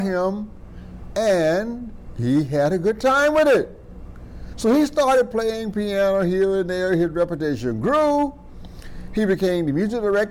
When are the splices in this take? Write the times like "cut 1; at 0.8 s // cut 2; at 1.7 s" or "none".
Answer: none